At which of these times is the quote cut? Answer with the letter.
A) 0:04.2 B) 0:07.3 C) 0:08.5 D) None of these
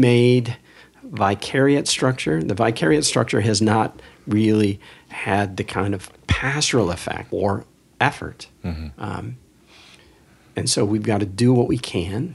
B